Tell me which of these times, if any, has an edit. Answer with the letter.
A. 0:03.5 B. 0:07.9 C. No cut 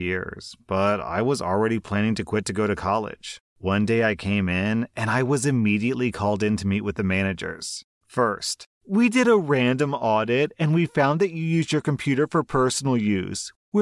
B